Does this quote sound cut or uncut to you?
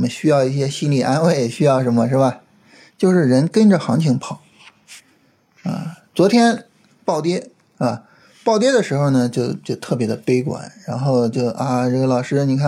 cut